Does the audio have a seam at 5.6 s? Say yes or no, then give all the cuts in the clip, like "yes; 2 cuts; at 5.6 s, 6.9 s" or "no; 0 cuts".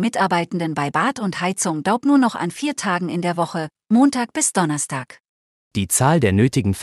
yes; 1 cut; at 5.6 s